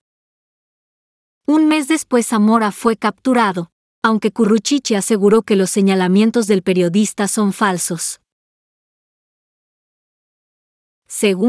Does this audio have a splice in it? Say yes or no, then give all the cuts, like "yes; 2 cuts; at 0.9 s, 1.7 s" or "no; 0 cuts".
no; 0 cuts